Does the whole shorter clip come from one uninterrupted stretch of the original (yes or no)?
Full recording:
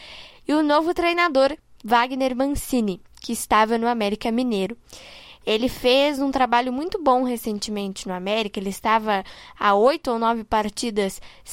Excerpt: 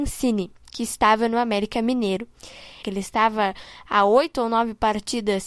no